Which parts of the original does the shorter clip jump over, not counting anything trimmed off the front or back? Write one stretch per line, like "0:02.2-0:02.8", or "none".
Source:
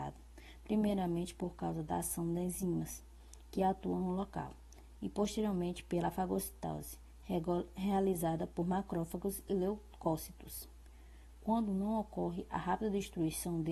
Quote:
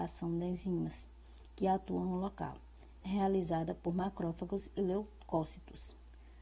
0:05.0-0:07.7